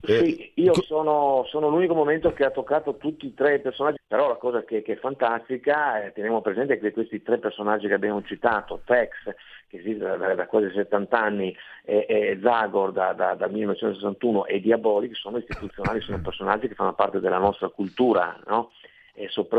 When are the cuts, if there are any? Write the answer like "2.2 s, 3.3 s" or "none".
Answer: 4.0 s